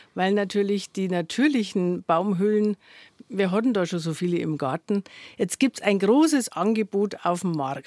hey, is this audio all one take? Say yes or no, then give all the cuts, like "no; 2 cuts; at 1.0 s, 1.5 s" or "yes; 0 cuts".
yes; 0 cuts